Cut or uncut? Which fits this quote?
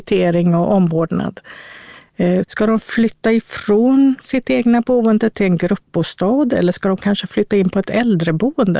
cut